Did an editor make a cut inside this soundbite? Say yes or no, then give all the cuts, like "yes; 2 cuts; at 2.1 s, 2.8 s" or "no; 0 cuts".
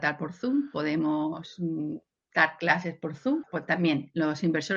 yes; 1 cut; at 3.4 s